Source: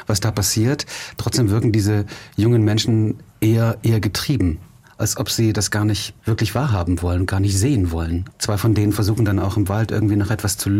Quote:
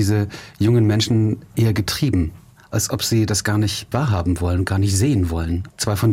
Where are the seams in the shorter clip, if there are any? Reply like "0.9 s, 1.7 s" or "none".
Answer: 1.5 s, 3.9 s

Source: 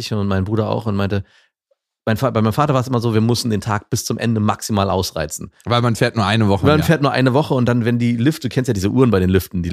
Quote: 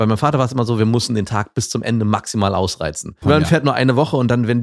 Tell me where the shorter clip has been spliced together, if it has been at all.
3.2 s

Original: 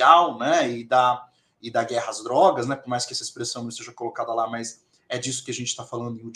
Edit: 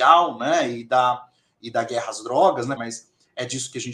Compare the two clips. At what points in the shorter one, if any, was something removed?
2.8 s

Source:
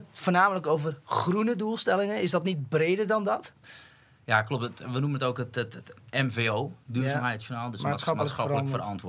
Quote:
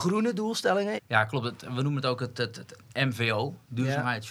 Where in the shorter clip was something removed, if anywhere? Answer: 1.0 s

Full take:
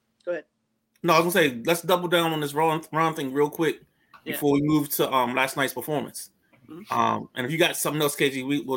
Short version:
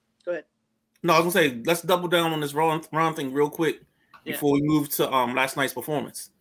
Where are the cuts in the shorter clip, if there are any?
none

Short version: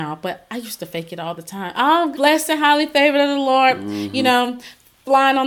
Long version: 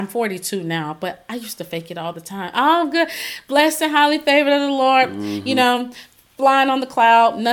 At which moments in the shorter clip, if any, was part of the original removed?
2.1 s

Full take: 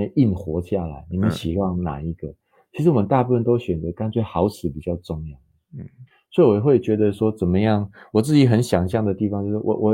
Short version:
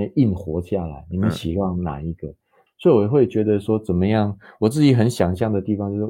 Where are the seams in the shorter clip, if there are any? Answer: 2.7 s

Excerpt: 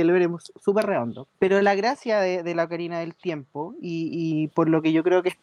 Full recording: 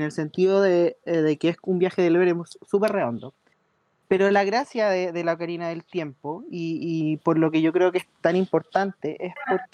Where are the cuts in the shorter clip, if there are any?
1.3 s

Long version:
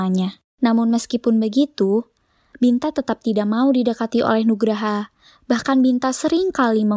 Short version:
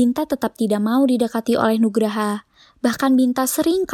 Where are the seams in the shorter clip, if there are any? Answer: none

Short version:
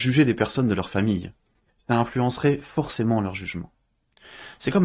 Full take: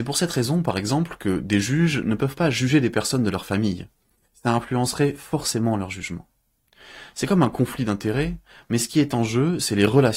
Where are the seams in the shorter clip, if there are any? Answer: none

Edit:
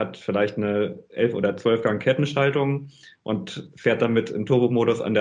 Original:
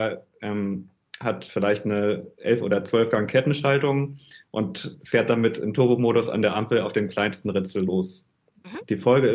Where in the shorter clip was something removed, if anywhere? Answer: none

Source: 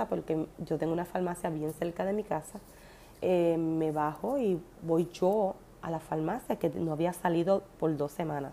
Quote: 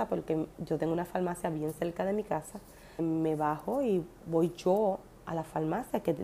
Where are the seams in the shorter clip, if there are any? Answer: 3.0 s

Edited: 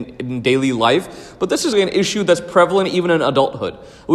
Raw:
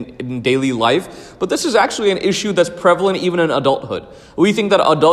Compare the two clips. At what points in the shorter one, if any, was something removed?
1.7 s

